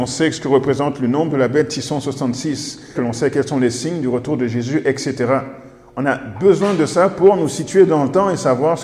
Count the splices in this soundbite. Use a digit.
1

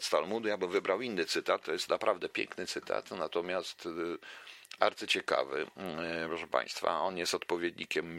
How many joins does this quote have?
0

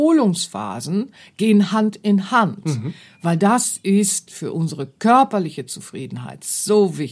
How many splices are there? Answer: 0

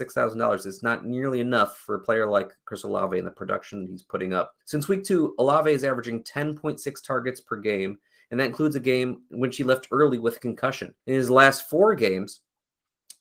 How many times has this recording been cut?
2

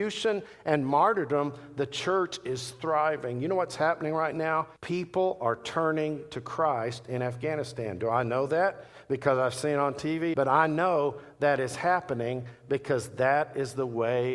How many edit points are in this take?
2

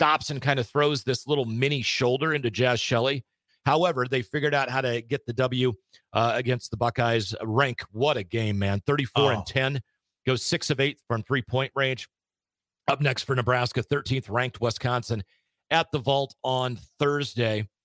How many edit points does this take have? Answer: 1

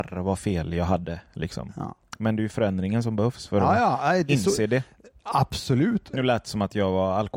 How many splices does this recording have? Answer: 1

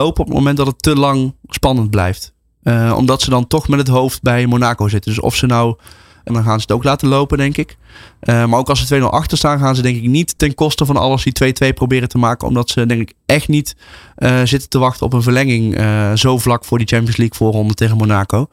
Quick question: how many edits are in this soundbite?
1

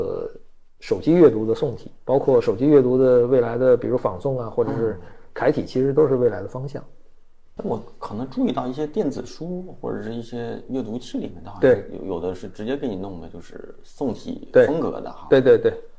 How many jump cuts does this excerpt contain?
0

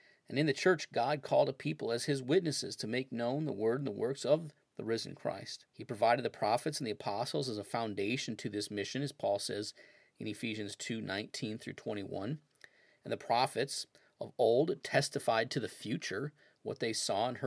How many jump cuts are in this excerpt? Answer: 1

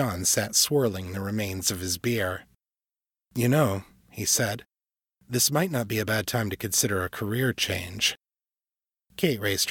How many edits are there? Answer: 0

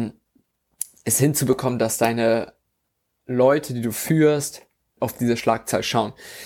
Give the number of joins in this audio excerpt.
1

